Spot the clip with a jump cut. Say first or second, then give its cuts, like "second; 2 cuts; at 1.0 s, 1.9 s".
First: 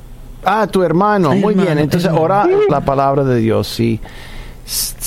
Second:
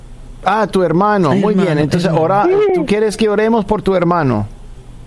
first; 1 cut; at 2.7 s